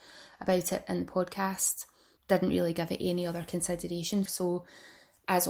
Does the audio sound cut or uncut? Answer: cut